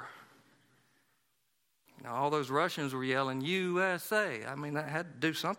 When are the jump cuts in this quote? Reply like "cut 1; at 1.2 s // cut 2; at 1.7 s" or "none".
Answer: none